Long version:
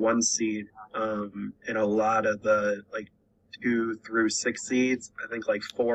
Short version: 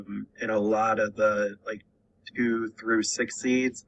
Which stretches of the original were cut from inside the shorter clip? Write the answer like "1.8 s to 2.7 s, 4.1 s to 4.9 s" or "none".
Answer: none